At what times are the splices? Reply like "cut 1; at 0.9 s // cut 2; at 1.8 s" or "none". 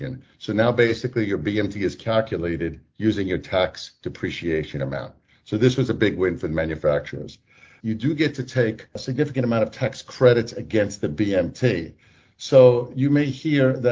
cut 1; at 7.8 s